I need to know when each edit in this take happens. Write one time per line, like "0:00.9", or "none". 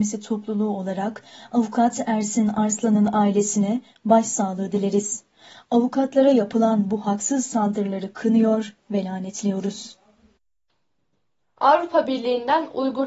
none